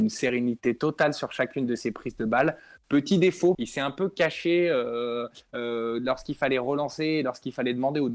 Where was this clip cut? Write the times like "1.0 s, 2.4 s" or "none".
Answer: 3.5 s